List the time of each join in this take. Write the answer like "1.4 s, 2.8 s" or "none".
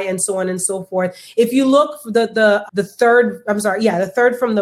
2.7 s

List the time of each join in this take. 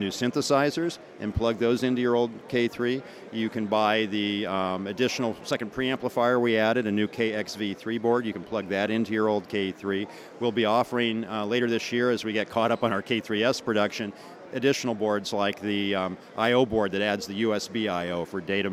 none

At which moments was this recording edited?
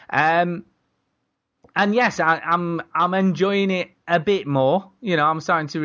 none

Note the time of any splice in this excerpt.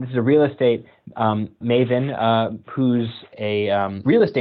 1.6 s, 3.3 s

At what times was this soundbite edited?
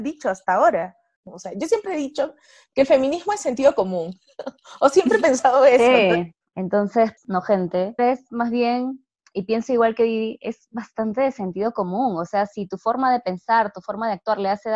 6.5 s, 8.0 s

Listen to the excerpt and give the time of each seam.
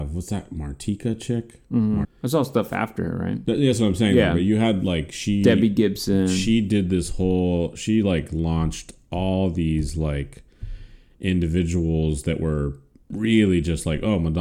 2.0 s

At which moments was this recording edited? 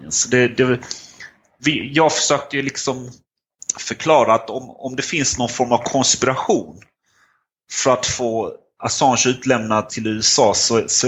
9.9 s

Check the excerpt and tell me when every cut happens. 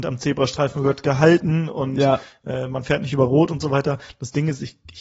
none

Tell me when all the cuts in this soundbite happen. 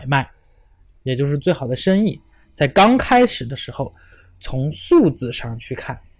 none

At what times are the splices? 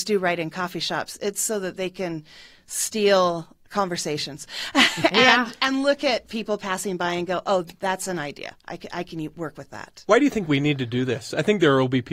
none

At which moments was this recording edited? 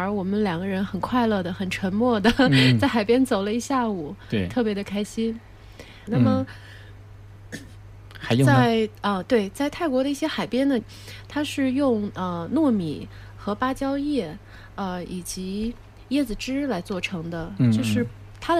6.1 s, 10.8 s

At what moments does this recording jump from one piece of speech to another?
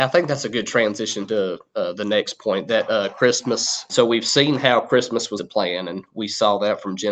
3.9 s, 5.4 s

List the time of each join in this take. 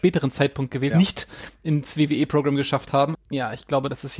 0.9 s, 3.1 s

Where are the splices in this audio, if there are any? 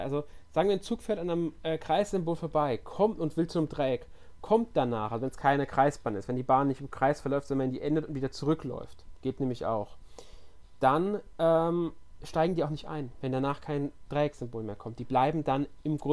none

